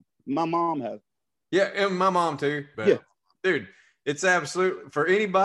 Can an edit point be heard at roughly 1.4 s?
no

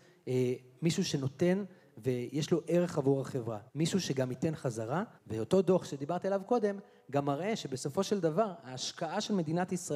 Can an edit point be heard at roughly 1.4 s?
no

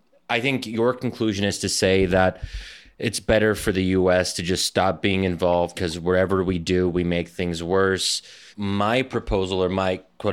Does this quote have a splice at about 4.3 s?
no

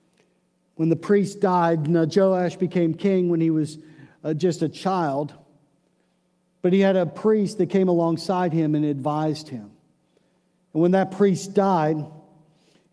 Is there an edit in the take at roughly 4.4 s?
no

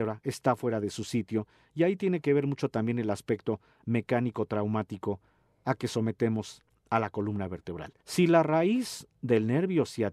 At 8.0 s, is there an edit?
yes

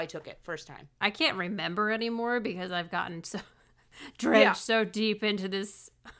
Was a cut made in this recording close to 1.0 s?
yes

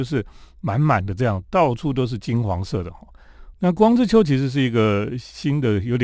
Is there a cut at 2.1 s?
no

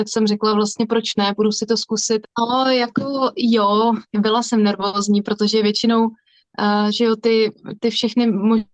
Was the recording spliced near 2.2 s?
yes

